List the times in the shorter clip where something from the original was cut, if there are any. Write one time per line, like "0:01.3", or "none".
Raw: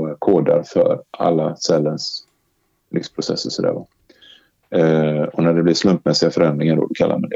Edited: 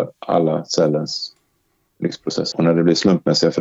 0:02.5